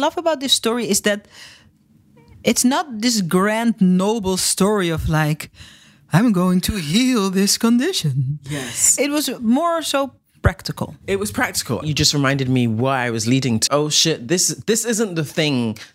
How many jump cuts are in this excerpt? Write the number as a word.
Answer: two